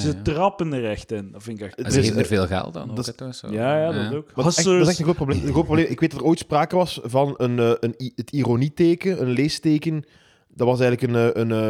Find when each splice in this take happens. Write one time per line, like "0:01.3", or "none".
0:05.3